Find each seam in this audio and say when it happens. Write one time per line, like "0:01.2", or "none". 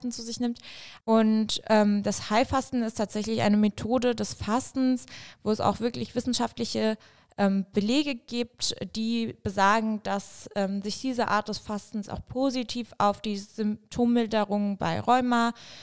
0:01.0